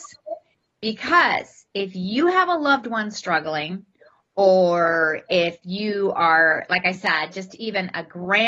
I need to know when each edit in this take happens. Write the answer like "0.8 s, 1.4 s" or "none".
none